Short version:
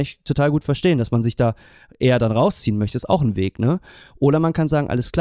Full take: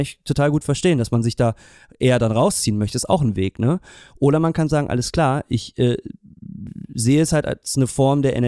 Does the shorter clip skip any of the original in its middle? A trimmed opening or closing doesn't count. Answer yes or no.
no